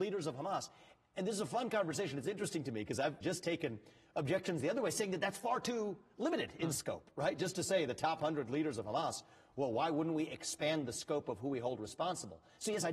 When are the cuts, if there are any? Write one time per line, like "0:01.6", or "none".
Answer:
0:03.2

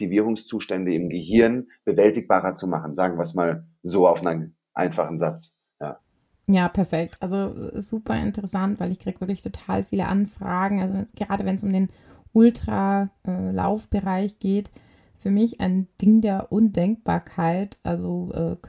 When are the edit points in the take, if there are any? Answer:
none

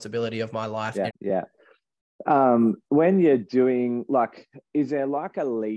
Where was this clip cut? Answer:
0:01.1

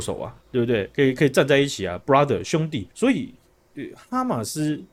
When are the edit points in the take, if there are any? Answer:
0:02.9

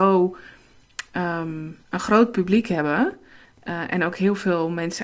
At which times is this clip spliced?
0:01.8

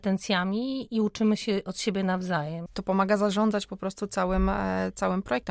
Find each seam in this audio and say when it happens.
0:02.7

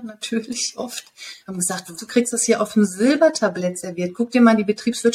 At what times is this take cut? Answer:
0:02.0

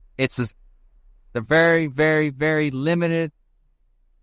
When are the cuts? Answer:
none

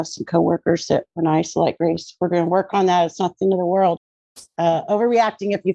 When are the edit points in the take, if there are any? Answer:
0:04.0

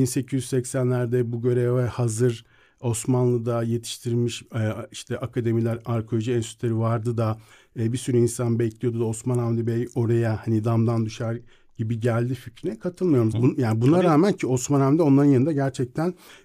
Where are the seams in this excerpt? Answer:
0:13.3

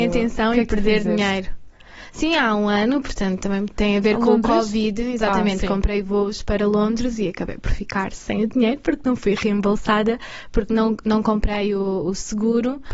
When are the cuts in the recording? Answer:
none

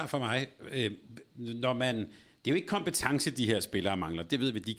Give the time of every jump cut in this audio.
none

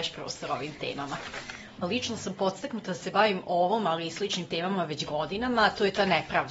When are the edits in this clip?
0:01.8

